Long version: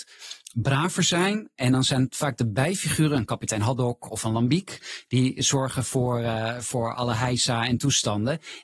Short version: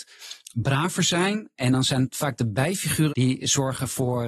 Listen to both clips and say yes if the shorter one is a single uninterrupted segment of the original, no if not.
no